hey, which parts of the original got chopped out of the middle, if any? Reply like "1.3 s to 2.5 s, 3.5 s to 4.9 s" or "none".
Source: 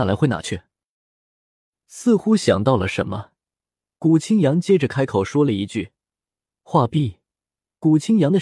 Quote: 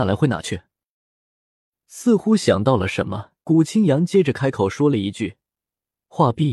3.4 s to 3.9 s